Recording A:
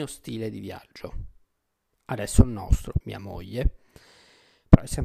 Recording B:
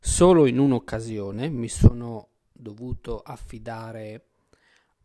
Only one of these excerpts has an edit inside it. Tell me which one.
A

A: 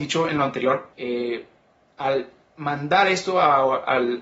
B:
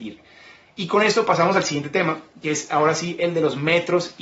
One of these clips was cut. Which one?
A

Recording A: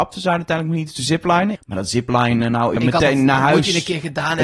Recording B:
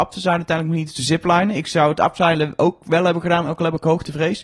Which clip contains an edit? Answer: A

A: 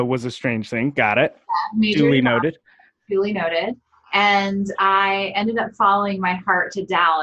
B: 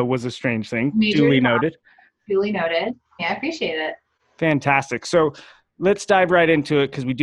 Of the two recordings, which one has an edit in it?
B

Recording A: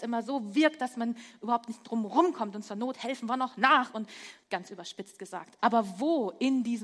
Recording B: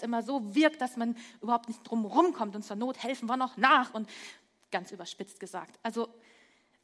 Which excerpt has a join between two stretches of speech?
A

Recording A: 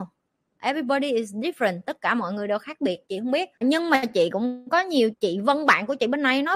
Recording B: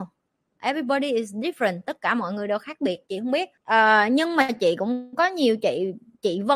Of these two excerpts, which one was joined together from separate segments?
A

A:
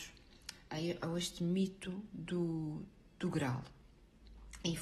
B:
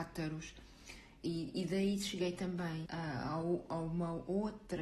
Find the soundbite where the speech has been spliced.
B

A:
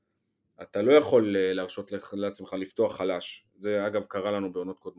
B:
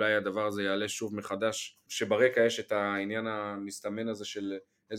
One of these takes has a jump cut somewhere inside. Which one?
B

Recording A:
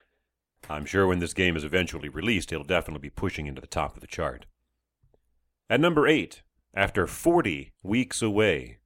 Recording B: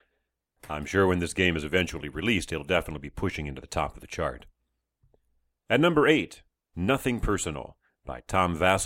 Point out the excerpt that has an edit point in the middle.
B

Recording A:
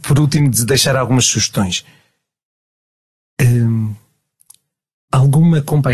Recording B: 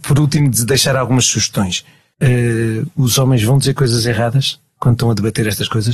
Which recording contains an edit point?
B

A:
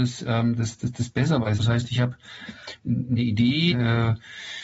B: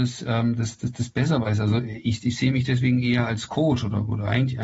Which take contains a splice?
A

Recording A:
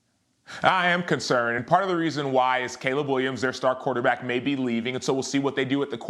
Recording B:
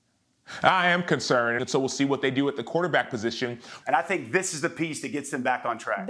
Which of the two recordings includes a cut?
B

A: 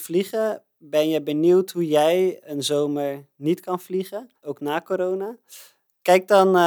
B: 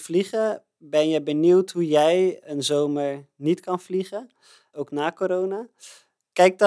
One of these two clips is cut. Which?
A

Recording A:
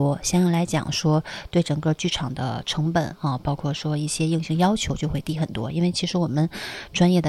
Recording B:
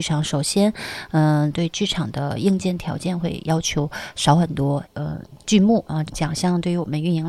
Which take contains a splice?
B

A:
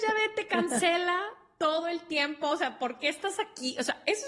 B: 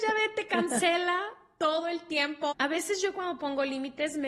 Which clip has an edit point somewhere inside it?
B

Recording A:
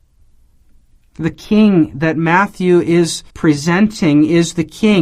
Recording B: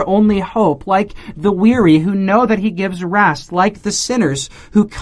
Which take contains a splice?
A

